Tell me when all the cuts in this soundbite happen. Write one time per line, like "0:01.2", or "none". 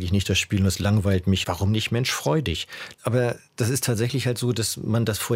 0:01.4
0:02.9